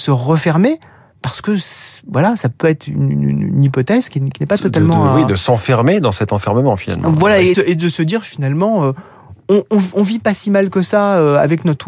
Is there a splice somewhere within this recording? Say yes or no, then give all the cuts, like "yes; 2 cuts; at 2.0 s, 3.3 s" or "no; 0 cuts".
yes; 1 cut; at 7.5 s